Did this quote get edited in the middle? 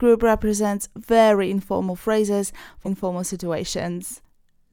yes; 1 cut; at 2.8 s

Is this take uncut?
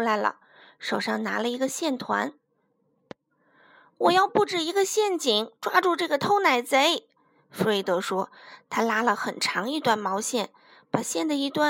yes; 0 cuts

